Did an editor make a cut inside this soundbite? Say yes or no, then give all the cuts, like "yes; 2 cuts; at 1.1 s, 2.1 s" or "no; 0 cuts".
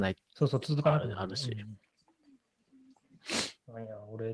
no; 0 cuts